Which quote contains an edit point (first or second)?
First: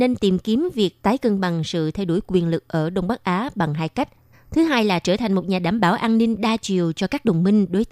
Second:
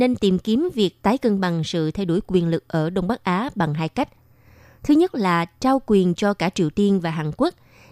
first